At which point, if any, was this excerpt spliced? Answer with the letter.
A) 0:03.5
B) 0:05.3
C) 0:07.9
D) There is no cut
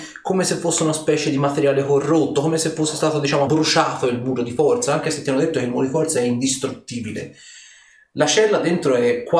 A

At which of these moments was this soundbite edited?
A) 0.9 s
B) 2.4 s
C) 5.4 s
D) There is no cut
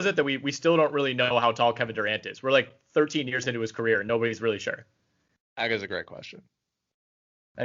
D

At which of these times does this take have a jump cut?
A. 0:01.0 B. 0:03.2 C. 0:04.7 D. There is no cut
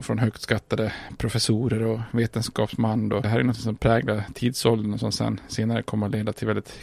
B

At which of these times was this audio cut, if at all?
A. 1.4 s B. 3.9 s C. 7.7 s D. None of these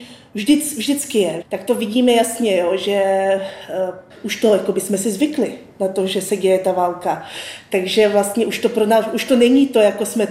A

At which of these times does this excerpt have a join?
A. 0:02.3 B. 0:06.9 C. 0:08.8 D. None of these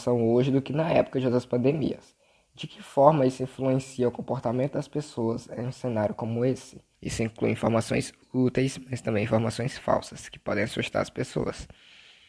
B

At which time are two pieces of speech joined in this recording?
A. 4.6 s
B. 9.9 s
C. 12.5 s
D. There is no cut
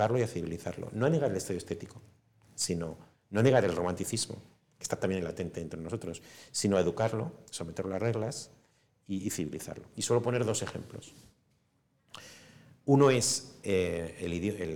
D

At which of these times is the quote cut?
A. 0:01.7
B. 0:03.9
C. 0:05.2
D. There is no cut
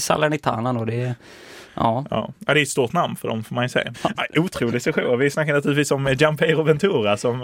B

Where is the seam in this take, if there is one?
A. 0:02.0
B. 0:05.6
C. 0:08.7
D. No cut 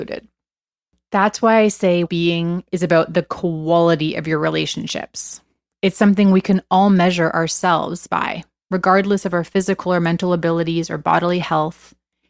A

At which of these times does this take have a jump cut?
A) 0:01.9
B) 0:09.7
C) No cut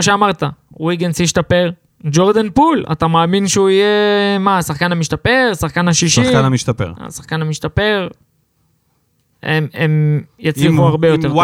B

